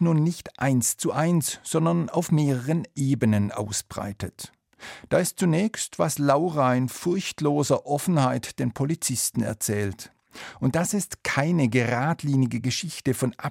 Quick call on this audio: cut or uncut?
uncut